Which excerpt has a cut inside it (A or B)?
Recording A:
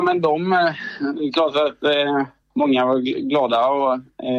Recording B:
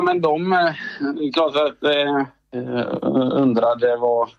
B